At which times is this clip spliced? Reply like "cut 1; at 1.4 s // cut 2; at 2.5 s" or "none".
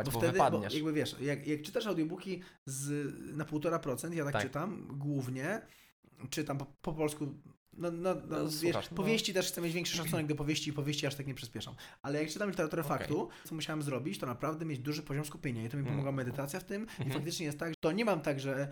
cut 1; at 13.5 s // cut 2; at 17.7 s